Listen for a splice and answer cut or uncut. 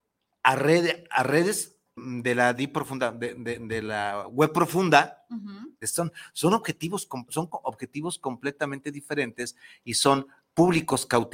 cut